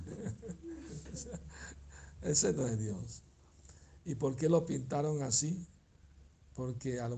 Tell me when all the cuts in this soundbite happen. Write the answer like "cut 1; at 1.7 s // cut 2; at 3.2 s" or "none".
cut 1; at 1.1 s